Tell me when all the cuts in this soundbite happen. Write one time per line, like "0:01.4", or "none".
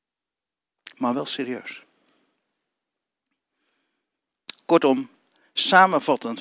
none